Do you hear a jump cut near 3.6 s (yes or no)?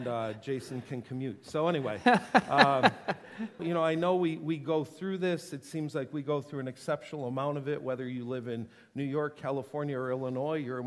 yes